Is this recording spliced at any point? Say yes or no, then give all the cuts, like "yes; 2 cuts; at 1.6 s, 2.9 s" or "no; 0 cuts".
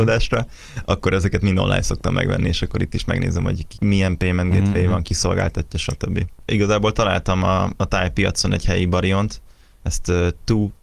no; 0 cuts